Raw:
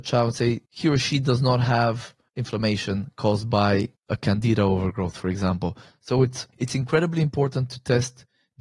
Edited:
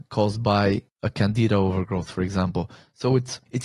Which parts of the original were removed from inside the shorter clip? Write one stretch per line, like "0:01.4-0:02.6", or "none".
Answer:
none